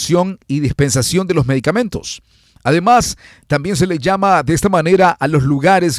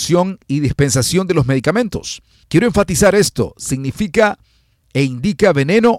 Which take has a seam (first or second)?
second